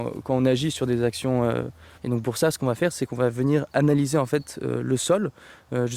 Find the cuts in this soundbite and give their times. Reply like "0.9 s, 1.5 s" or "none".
2.0 s